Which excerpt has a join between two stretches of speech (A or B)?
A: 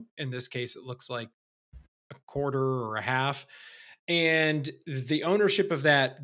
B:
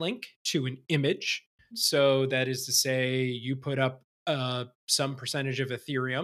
B